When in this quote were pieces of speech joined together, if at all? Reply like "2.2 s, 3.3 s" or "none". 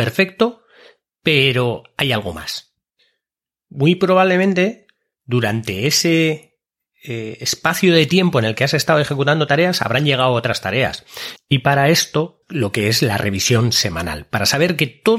11.4 s, 12.4 s